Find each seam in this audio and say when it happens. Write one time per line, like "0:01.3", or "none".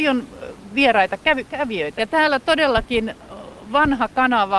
0:02.0